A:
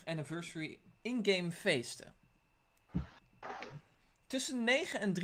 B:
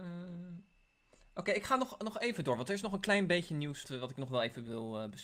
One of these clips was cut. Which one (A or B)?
B